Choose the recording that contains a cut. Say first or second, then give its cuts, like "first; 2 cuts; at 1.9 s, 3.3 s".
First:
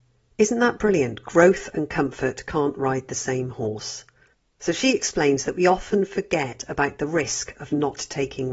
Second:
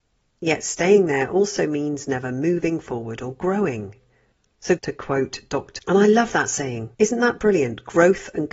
second; 3 cuts; at 4.8 s, 5.8 s, 6.9 s